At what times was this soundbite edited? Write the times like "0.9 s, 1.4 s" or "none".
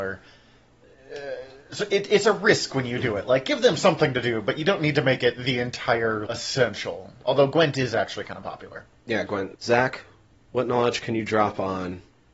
6.3 s, 9.6 s